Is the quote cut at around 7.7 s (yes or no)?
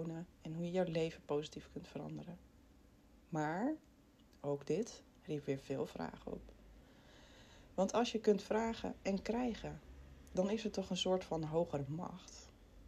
no